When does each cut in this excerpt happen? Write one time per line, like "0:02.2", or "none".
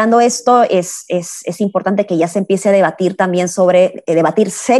none